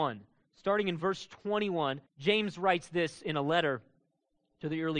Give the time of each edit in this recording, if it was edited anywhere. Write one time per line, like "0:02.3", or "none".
0:02.1